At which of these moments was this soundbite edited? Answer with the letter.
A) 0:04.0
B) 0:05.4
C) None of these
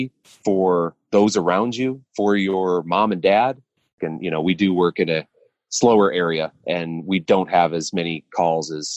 A